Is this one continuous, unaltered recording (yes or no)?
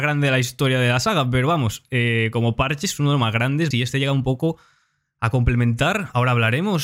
no